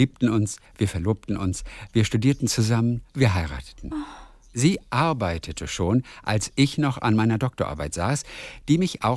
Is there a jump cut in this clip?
yes; 1 cut; at 3.1 s

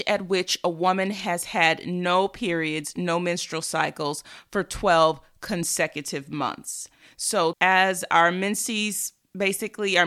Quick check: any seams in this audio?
yes; 1 cut; at 7.5 s

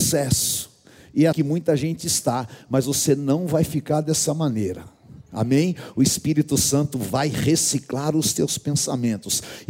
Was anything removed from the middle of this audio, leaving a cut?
yes; 1 cut; at 1.3 s

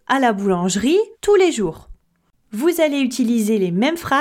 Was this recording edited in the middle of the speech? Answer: yes; 1 cut; at 1.1 s

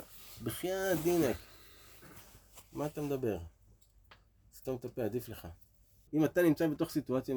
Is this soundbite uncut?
no; 1 cut; at 6.1 s

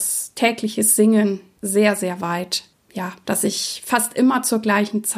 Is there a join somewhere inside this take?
yes; 1 cut; at 3.2 s

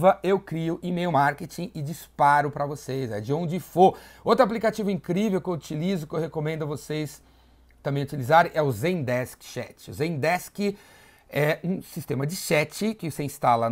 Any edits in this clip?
no; 0 cuts

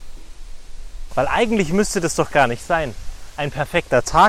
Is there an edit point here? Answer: yes; 1 cut; at 1.1 s

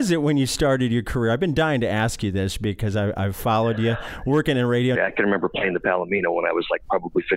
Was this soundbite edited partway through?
yes; 1 cut; at 5.0 s

